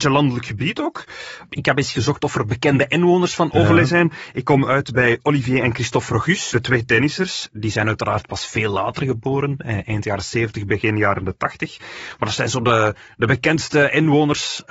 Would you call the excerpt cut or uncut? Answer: cut